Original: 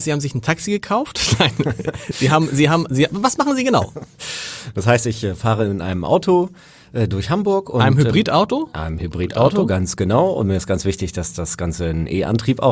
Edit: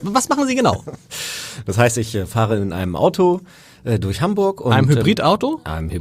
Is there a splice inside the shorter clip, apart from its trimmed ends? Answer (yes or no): no